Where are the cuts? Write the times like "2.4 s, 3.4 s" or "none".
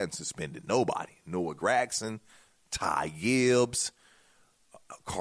none